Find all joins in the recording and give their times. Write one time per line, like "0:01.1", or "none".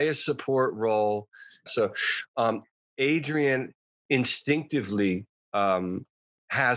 0:01.7